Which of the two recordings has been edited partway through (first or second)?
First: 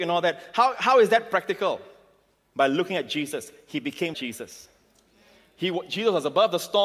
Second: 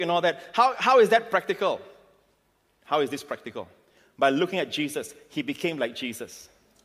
first